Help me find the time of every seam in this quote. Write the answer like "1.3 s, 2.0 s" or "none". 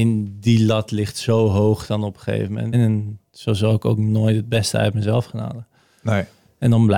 2.7 s